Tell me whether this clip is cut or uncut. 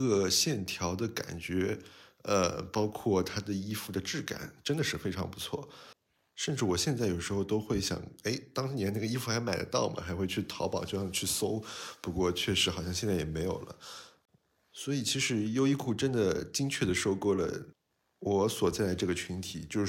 uncut